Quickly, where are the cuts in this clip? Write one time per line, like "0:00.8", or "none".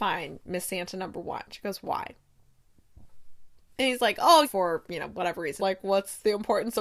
0:04.4
0:05.6

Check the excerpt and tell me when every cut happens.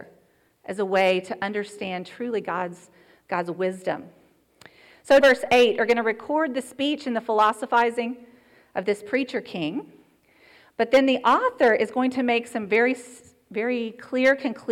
0:05.2

